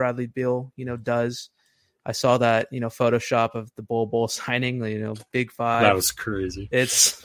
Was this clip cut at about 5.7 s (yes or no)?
no